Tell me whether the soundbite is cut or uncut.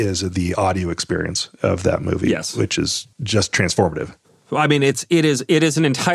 cut